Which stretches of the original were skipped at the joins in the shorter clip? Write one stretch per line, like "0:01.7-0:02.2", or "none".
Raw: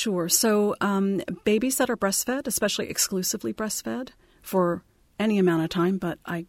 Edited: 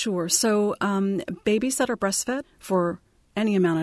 0:02.4-0:04.3